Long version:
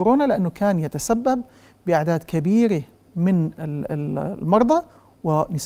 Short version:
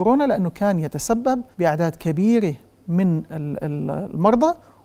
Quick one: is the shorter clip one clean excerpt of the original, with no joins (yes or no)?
no